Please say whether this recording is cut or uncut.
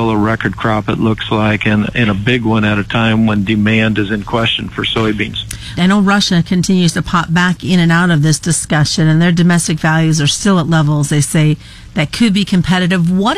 cut